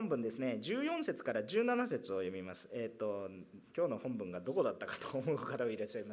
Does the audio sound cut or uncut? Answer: uncut